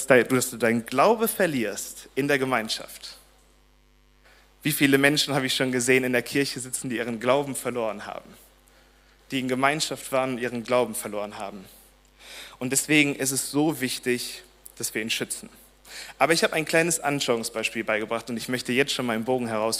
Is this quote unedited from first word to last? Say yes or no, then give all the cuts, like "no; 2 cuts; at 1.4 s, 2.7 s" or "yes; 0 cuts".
yes; 0 cuts